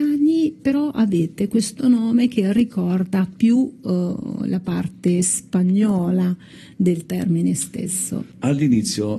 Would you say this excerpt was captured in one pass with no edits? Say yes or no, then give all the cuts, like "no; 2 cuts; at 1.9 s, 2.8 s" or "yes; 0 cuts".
yes; 0 cuts